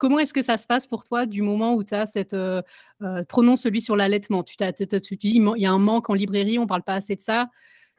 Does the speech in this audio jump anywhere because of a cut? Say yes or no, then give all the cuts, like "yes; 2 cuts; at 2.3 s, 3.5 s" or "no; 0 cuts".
no; 0 cuts